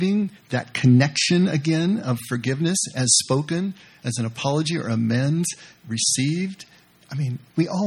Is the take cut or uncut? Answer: uncut